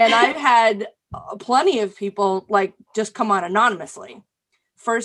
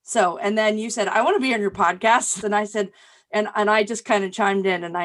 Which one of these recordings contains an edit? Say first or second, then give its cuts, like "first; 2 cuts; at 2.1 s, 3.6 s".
second; 1 cut; at 2.4 s